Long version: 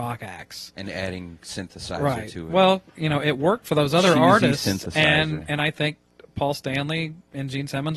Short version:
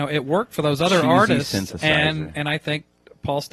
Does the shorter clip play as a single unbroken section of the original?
yes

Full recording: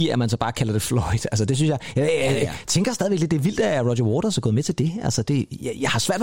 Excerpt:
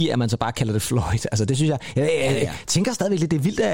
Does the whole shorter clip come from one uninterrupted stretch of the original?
yes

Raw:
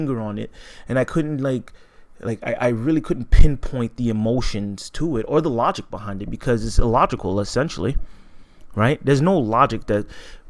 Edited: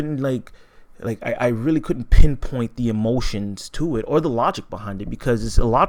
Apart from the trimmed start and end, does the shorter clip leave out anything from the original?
no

